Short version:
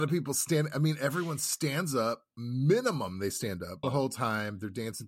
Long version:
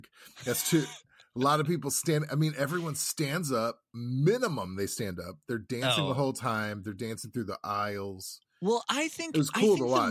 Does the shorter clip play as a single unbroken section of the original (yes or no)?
no